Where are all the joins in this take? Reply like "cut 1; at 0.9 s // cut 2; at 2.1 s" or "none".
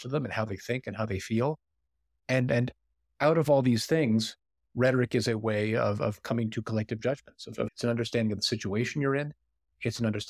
cut 1; at 7.7 s